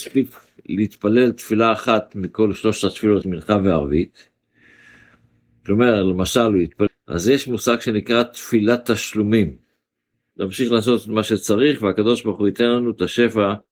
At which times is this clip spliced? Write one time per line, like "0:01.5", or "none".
0:03.2
0:06.9
0:10.3